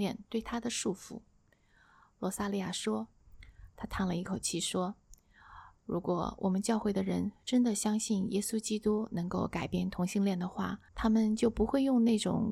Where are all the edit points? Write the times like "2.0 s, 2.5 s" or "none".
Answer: 3.2 s, 10.9 s